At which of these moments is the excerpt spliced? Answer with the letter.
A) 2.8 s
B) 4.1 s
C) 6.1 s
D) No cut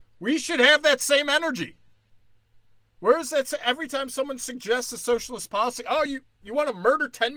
D